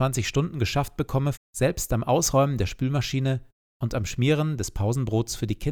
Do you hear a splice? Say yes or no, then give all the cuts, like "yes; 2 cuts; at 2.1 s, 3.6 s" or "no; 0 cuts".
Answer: yes; 1 cut; at 1.3 s